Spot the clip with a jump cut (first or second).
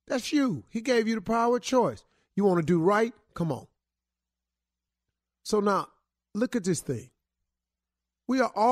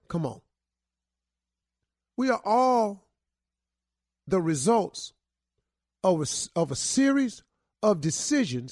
second